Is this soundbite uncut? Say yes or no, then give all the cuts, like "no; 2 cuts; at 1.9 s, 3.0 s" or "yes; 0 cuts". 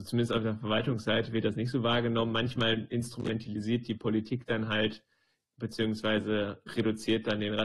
no; 1 cut; at 5.4 s